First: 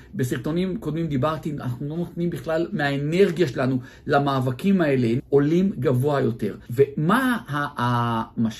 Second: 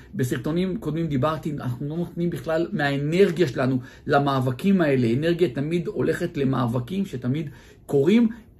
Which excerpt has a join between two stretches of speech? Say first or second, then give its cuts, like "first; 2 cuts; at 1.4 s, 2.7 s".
first; 2 cuts; at 5.2 s, 6.7 s